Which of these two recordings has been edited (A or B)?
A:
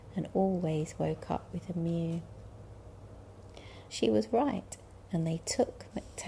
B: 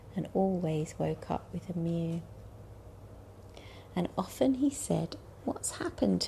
A